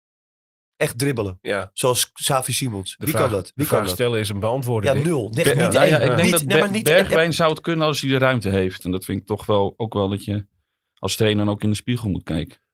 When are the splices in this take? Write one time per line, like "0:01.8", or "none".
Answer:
0:08.8